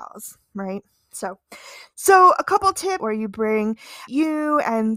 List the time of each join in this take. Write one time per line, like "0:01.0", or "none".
0:03.0
0:04.1